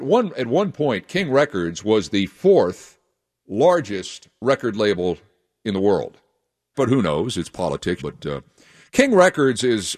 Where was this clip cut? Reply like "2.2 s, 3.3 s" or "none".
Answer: 6.7 s, 8.0 s